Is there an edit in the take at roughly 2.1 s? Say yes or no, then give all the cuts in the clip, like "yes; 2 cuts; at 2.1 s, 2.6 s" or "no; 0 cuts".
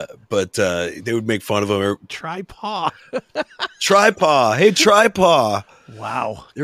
yes; 1 cut; at 2.1 s